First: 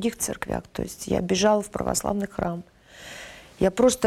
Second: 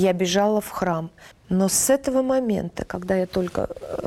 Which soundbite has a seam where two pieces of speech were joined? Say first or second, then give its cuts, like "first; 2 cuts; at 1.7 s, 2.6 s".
second; 1 cut; at 1.3 s